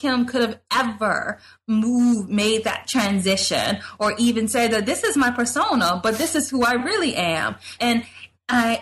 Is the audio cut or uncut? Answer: cut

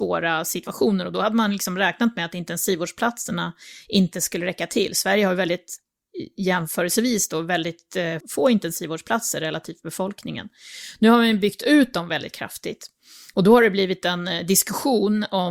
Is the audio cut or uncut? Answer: cut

